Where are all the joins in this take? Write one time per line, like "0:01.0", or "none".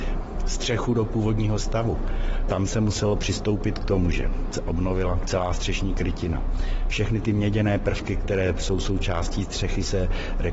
none